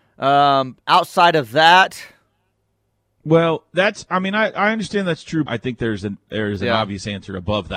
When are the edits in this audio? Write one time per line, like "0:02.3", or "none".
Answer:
0:05.5